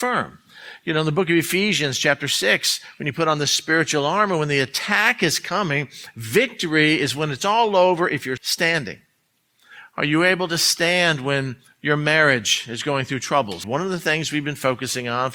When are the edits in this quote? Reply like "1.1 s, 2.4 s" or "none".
8.4 s, 13.6 s